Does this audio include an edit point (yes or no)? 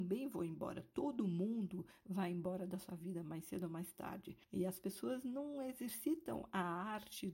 no